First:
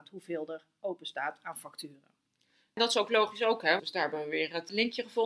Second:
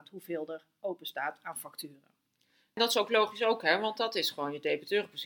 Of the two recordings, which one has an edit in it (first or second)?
first